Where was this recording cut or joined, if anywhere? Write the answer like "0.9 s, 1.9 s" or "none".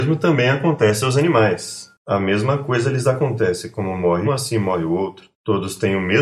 4.2 s